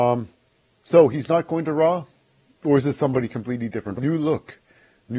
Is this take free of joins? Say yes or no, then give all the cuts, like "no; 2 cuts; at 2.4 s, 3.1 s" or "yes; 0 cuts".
no; 1 cut; at 4.0 s